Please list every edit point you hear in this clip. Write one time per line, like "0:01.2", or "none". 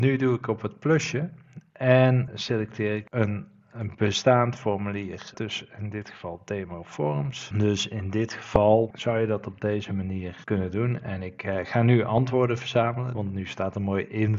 0:07.5
0:13.1